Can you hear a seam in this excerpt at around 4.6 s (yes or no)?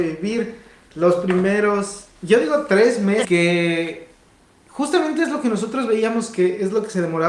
no